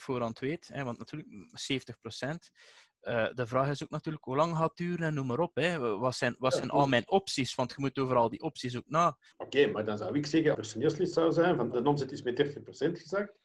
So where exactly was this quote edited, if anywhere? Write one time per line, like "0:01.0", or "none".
0:09.3
0:10.5
0:11.7